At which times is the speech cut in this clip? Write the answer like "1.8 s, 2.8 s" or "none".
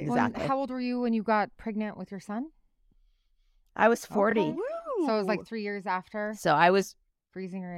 none